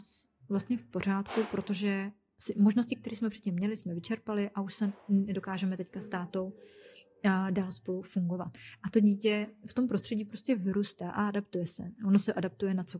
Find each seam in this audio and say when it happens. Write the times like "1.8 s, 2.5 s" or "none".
none